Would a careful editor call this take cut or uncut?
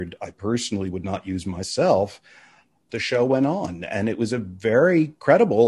cut